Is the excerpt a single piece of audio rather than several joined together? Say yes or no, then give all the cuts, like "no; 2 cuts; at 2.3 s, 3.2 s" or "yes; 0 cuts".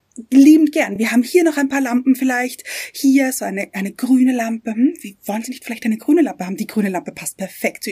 yes; 0 cuts